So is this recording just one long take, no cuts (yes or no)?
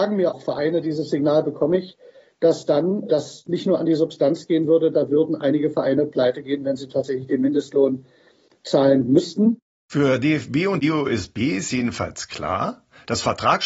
yes